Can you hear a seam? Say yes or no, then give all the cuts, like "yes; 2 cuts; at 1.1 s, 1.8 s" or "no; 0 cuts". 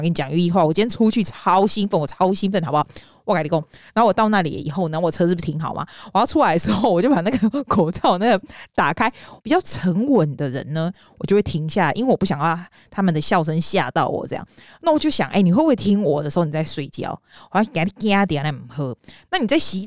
yes; 1 cut; at 9.4 s